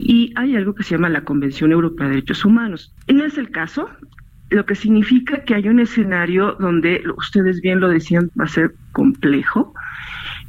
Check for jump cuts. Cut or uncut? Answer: cut